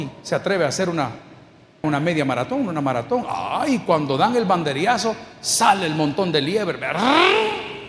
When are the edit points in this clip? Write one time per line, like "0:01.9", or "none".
0:01.8